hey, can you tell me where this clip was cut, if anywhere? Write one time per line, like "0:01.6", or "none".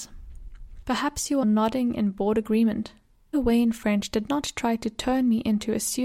0:01.4
0:03.3